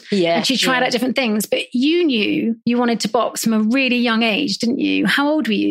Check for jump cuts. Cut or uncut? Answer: cut